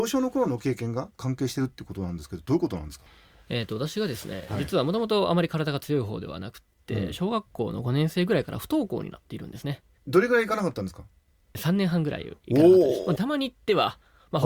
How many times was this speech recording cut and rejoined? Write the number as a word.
two